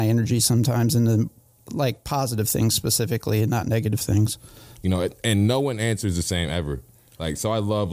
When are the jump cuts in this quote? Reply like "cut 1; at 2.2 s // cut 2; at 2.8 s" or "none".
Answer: cut 1; at 4.8 s